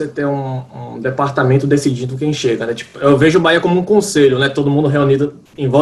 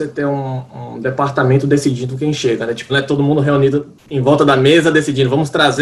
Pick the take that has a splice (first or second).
second